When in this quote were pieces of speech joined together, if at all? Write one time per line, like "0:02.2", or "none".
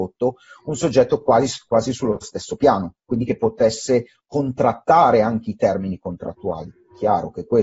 none